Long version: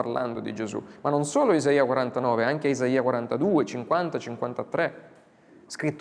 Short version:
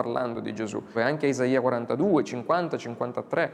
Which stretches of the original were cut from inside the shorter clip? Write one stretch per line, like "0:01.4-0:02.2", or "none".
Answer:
0:00.9-0:02.4